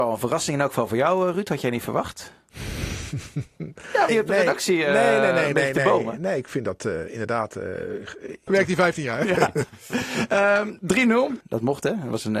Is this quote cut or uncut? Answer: cut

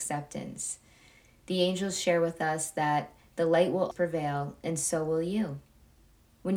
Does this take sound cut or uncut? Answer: cut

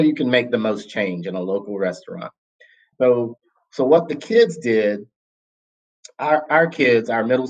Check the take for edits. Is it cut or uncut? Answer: cut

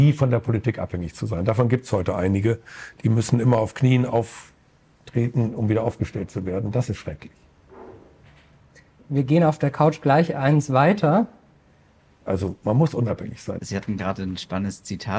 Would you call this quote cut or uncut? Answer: cut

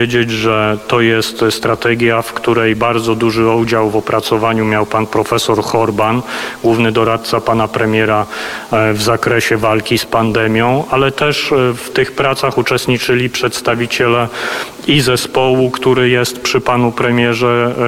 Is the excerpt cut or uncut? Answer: uncut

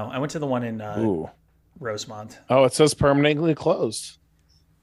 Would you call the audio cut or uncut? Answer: uncut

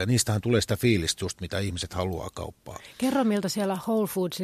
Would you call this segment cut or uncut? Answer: uncut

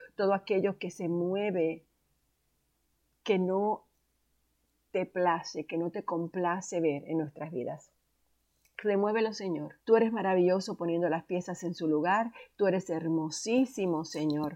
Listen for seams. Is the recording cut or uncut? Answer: cut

